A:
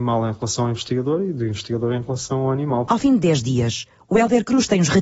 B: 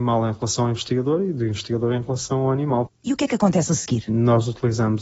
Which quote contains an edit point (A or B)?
B